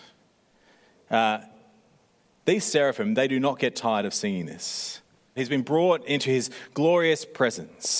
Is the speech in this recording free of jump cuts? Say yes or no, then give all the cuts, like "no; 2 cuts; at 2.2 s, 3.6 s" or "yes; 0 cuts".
no; 1 cut; at 5.4 s